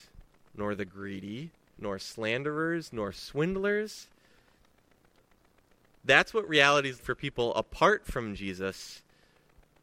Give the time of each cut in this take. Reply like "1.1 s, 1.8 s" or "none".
1.8 s, 5.9 s, 7.0 s